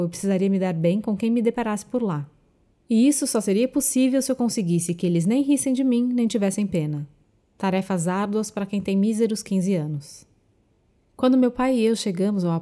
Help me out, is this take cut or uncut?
uncut